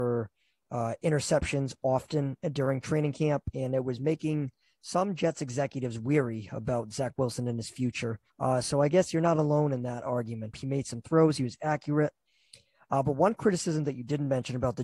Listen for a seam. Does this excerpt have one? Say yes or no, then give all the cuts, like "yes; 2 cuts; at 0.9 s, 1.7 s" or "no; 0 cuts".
yes; 2 cuts; at 8.3 s, 10.5 s